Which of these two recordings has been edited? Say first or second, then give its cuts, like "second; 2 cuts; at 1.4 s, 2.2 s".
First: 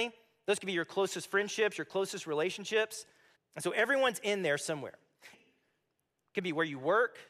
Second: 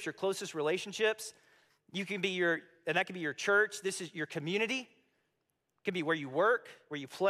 first; 2 cuts; at 3.3 s, 5.3 s